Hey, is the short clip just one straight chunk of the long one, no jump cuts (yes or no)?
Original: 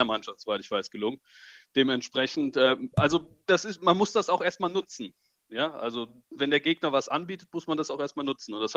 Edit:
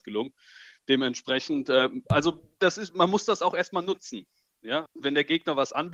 no